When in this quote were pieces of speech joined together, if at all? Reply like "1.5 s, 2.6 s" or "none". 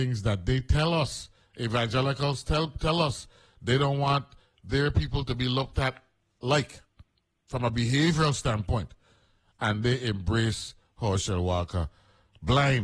none